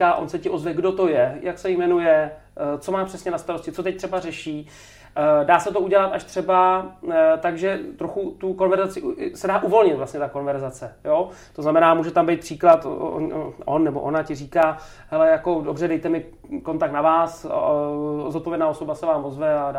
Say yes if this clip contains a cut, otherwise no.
no